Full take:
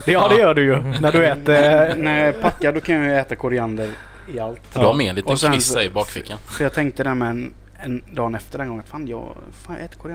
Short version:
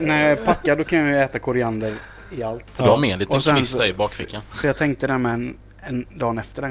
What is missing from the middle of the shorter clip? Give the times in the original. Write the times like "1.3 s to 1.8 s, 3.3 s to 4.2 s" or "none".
none